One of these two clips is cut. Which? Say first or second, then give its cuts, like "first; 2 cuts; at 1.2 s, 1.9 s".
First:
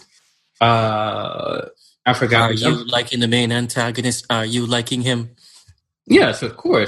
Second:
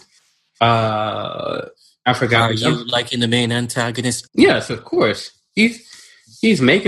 second; 1 cut; at 4.3 s